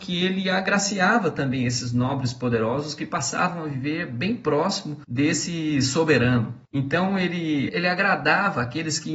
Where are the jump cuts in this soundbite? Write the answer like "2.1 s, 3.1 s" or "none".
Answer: 7.7 s